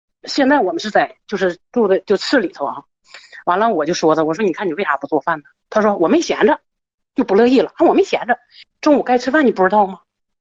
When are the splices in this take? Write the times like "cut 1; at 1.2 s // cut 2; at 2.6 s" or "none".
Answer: cut 1; at 8.6 s